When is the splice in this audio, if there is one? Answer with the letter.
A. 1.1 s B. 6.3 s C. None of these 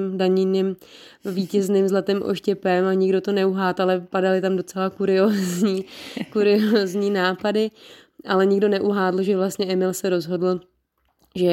C